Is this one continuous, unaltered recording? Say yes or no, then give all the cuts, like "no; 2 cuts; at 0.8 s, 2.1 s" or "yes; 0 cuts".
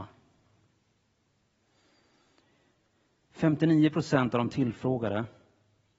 yes; 0 cuts